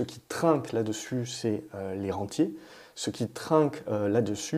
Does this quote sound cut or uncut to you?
uncut